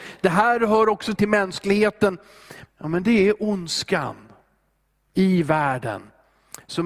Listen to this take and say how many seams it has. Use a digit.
2